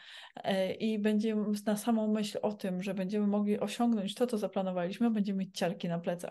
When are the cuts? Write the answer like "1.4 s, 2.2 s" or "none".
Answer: none